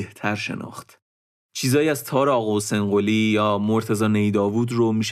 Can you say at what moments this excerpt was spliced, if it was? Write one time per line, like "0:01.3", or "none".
0:01.4

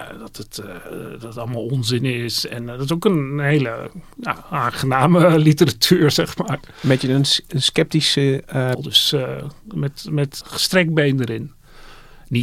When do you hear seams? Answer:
0:08.7
0:10.4

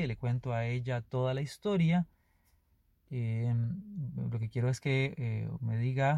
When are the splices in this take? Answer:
0:02.9

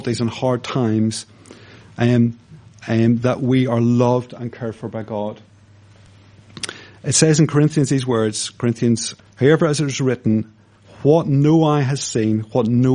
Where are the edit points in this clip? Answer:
0:09.2

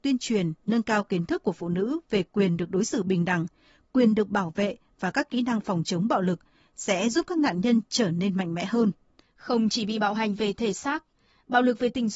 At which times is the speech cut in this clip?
0:09.2

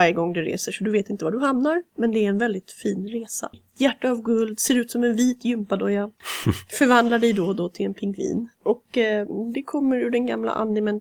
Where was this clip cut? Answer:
0:03.5
0:09.5

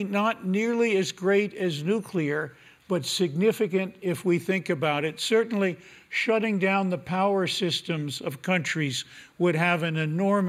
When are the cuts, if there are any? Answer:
none

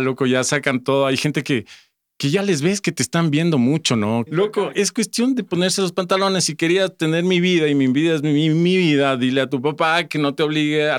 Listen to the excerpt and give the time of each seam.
0:04.3

